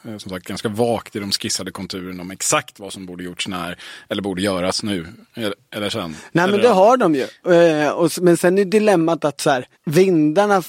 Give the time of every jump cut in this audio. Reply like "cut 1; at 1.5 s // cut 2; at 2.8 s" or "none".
cut 1; at 9.7 s